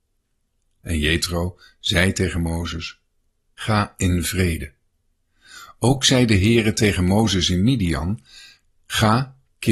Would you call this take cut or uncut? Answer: uncut